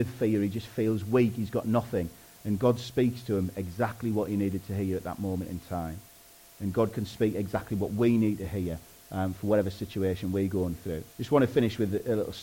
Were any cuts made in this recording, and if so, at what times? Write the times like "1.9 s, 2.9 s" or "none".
11.1 s